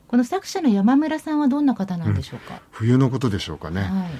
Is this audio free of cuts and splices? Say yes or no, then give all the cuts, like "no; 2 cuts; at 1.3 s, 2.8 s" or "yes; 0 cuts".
no; 1 cut; at 2.6 s